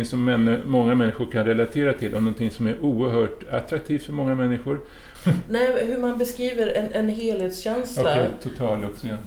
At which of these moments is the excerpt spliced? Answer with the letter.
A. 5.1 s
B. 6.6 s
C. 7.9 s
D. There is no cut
A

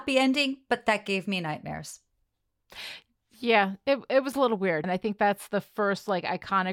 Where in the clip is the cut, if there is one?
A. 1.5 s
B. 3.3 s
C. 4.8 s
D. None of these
C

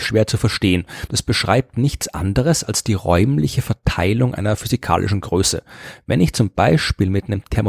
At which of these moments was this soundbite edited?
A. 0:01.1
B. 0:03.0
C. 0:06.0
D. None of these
D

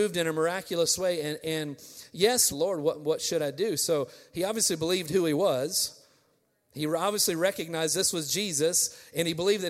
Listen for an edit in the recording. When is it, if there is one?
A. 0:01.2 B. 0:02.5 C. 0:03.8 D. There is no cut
B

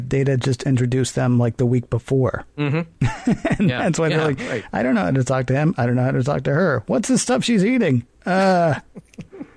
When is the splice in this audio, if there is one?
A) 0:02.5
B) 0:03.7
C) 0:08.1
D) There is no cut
A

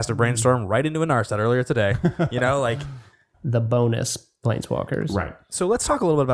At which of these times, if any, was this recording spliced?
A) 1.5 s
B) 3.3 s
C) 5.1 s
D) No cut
B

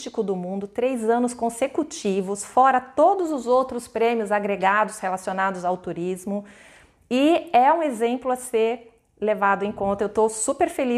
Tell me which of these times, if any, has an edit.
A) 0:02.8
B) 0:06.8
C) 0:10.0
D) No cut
D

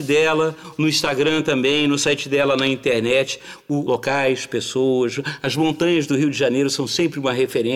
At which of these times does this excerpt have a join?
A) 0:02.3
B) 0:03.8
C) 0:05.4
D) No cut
B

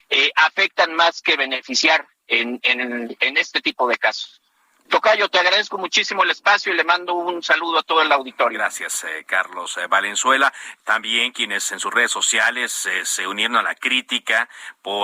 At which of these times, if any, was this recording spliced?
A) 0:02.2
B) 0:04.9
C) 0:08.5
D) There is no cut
B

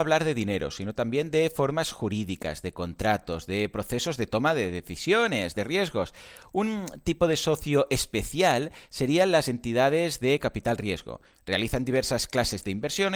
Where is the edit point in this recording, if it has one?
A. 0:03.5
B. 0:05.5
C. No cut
B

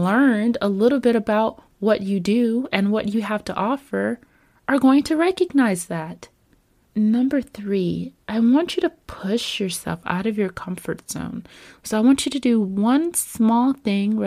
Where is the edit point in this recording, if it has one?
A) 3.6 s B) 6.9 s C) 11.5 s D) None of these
B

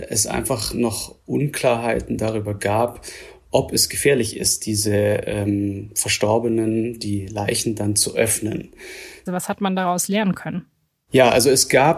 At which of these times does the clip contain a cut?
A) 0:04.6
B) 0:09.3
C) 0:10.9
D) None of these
B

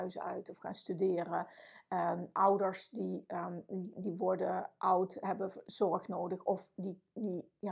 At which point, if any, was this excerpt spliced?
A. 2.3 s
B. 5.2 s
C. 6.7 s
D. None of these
D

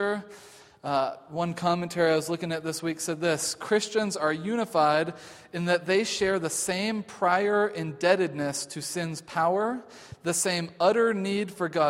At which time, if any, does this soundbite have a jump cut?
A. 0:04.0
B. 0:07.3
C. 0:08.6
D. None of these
D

